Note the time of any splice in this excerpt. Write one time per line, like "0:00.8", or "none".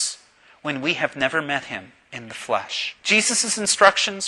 0:03.0